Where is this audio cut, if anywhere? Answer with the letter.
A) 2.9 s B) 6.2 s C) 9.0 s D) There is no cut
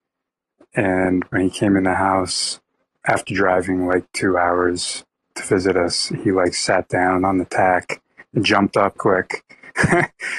C